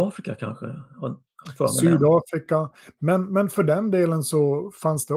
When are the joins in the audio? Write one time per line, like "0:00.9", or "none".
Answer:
none